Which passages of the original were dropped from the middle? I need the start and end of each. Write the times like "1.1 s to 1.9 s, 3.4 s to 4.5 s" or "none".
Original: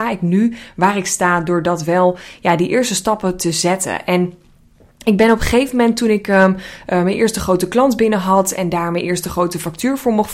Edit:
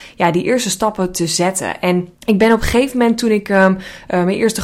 4.4 s to 4.9 s

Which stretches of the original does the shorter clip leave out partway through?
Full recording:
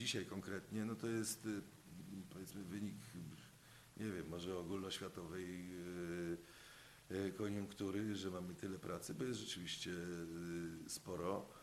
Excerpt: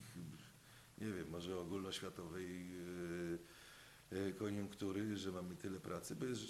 none

